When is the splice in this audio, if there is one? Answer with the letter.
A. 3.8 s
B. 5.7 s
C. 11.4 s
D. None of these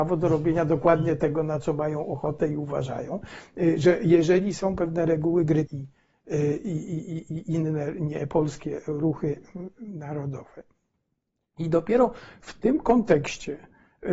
B